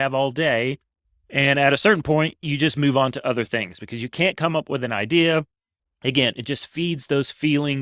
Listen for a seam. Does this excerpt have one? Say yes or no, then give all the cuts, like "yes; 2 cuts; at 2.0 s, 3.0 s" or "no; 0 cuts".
no; 0 cuts